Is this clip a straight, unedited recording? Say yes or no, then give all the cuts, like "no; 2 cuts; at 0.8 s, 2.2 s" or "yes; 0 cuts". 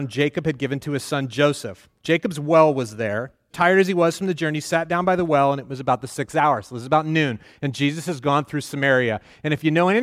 no; 1 cut; at 3.5 s